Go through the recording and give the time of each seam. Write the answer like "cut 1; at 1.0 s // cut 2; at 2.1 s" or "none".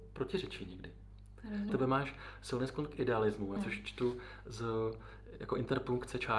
cut 1; at 1.7 s // cut 2; at 3.6 s